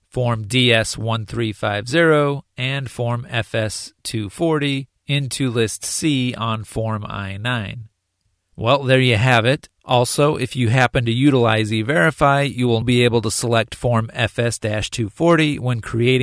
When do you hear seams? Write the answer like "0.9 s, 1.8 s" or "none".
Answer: 8.4 s, 9.7 s, 12.8 s